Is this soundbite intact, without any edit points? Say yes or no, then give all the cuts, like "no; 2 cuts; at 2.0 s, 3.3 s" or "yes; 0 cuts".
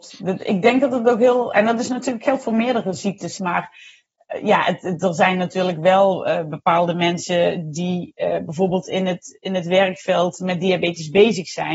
no; 1 cut; at 3.4 s